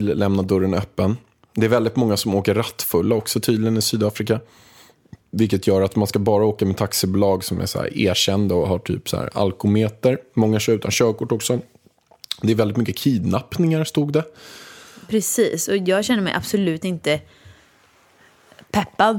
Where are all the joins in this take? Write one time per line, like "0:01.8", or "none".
0:05.2

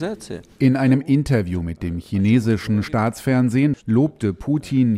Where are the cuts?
0:03.7

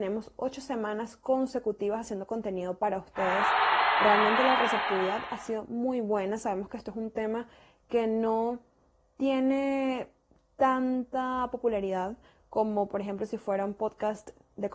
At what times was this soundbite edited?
none

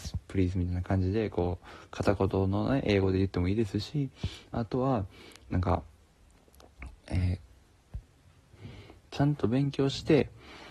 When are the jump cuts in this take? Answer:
none

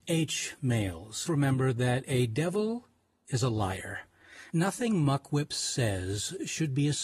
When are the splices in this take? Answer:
0:01.3

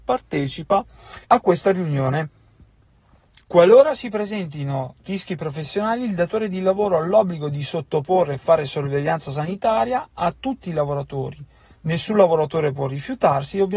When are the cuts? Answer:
0:01.2
0:03.4

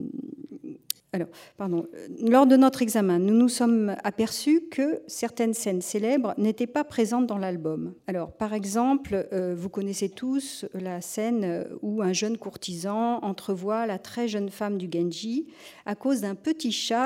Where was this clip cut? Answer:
0:01.0
0:08.0

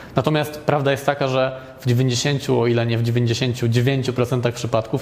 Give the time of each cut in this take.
none

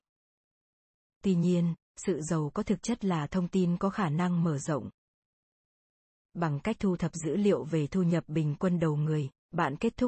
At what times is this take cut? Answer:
0:06.2

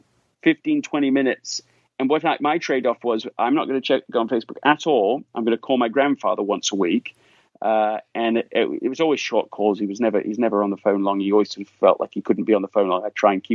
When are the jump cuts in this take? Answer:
none

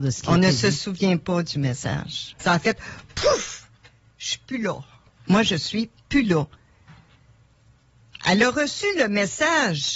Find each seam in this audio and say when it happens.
0:02.4

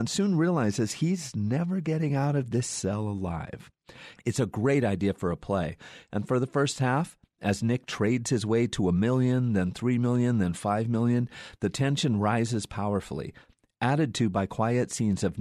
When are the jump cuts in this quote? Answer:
0:04.2

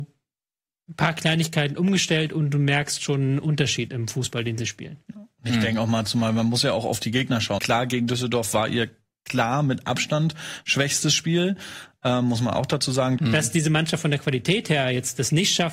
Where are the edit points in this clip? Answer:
0:07.6
0:13.2

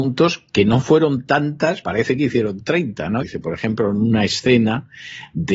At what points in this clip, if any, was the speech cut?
0:01.8
0:03.2

